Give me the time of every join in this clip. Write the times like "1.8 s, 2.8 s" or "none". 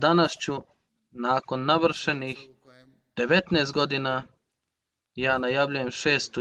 none